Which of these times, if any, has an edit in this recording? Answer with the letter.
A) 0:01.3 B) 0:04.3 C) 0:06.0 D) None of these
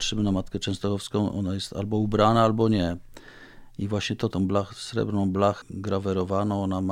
B